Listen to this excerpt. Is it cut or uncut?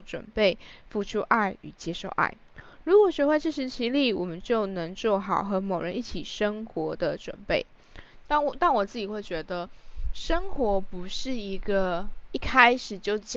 cut